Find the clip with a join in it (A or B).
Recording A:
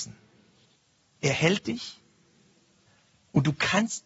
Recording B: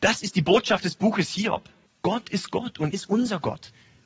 B